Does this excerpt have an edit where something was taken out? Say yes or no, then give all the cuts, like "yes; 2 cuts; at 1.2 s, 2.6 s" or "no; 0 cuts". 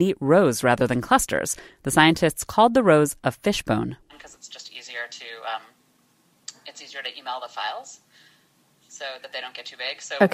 no; 0 cuts